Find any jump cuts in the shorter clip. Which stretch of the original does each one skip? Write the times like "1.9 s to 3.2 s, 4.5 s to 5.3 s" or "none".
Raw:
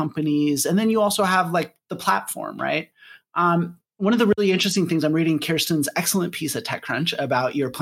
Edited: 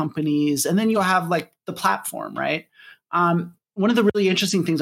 0.9 s to 1.2 s

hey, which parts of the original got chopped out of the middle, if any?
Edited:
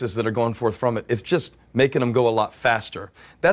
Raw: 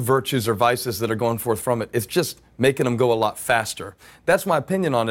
none

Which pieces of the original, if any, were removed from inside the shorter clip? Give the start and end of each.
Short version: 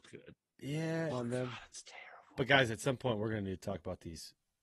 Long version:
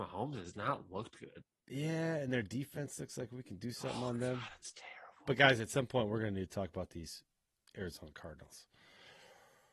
2.2 s to 4.0 s

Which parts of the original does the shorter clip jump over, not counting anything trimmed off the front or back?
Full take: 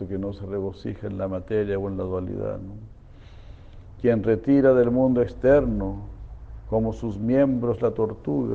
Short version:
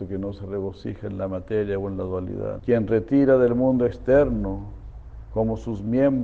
2.6 s to 4.0 s

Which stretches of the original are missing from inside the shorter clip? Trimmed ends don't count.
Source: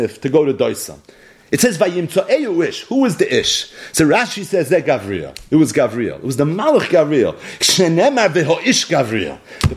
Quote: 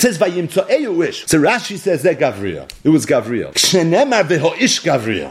2.8 s to 3.9 s, 6.2 s to 7.6 s

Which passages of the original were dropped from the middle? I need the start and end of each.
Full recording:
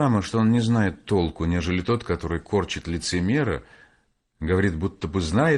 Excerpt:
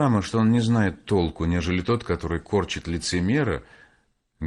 none

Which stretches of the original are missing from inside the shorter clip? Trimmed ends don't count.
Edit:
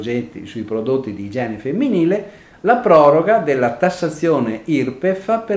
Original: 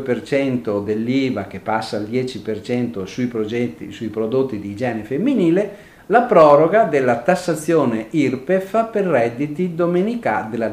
none

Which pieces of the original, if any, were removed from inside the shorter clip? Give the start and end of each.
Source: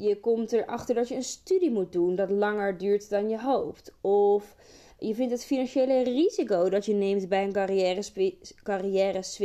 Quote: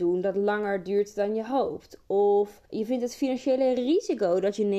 4.6 s to 4.9 s

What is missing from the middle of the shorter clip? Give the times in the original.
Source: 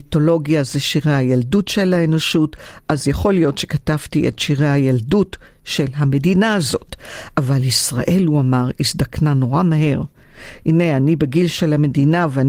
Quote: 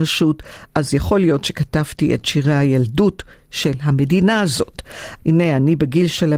7.3 s to 10.6 s

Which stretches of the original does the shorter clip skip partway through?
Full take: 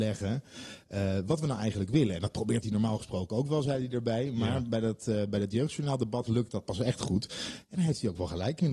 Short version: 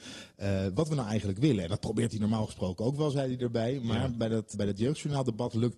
5.1 s to 5.3 s

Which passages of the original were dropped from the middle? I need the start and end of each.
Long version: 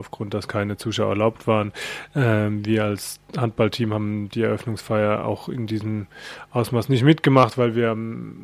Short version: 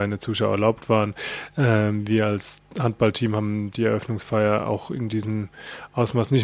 none

